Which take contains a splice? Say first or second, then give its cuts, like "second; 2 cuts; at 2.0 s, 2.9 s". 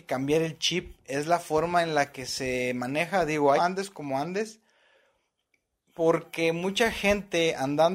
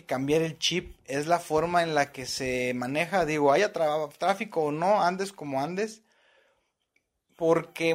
first; 1 cut; at 3.6 s